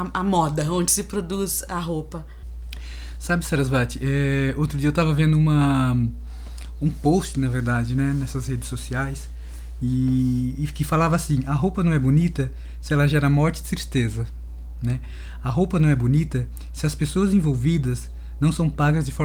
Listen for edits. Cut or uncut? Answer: uncut